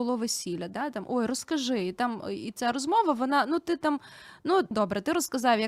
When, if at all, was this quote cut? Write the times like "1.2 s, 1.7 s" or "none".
4.7 s